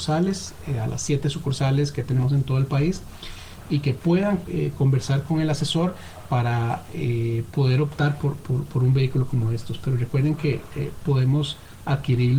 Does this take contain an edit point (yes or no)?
no